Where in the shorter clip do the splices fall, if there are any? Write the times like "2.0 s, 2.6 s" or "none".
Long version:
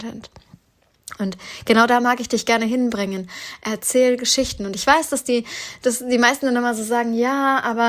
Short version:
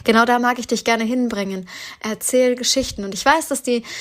none